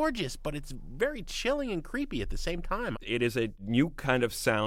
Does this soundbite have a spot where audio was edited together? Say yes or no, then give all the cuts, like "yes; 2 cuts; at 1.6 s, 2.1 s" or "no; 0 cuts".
yes; 1 cut; at 2.9 s